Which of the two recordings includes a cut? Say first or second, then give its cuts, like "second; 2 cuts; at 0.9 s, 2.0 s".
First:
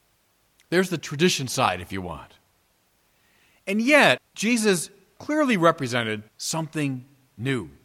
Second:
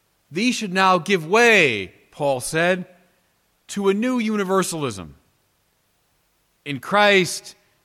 first; 2 cuts; at 4.2 s, 6.3 s